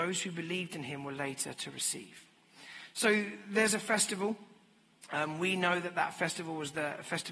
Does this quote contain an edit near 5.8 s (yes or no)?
no